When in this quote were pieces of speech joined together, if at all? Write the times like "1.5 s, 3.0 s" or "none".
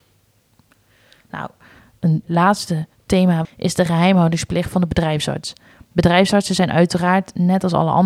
2.2 s, 3.4 s